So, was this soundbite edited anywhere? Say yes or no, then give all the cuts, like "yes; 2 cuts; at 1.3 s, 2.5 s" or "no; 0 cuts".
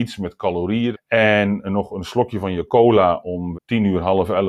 yes; 2 cuts; at 0.9 s, 3.5 s